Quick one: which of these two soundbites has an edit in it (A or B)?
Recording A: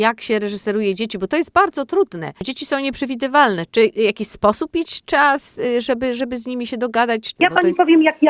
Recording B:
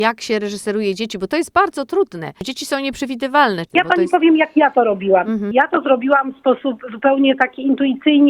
B